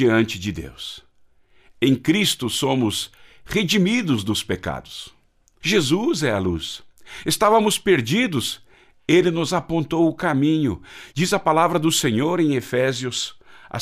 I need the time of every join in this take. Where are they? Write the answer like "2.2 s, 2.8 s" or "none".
5.6 s, 11.1 s